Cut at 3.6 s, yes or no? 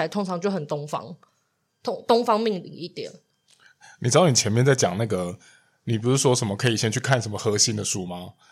no